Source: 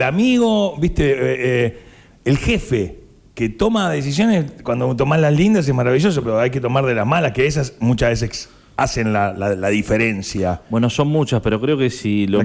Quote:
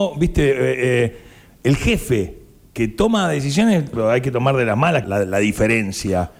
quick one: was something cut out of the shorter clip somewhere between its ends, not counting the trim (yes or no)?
yes